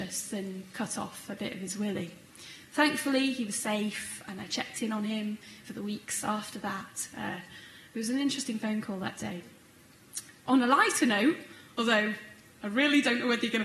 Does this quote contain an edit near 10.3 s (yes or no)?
no